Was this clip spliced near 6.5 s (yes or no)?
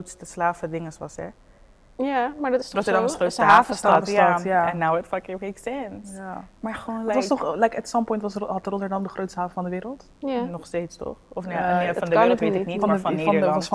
no